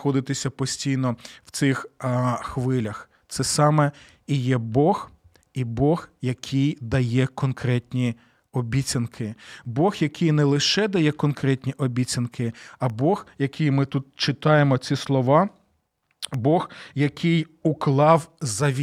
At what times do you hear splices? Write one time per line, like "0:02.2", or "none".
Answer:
none